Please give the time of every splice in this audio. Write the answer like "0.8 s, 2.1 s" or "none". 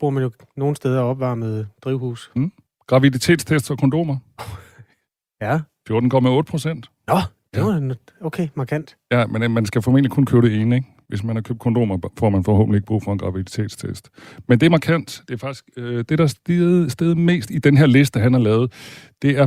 none